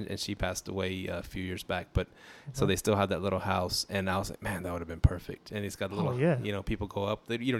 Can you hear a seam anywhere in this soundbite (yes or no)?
no